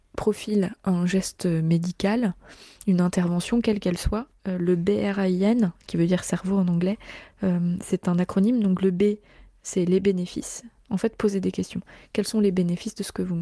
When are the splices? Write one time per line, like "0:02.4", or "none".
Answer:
none